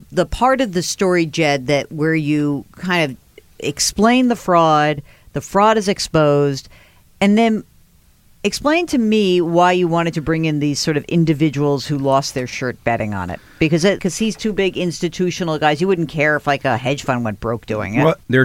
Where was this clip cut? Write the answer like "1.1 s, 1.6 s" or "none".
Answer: 14.0 s